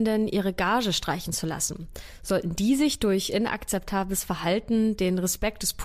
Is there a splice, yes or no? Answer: no